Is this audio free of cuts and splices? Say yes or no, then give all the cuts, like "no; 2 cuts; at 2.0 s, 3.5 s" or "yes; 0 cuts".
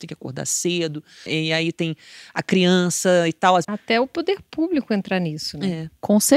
no; 2 cuts; at 1.3 s, 3.6 s